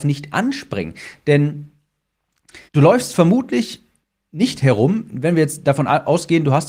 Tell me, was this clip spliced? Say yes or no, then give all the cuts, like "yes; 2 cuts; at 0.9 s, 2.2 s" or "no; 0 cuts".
yes; 1 cut; at 2.7 s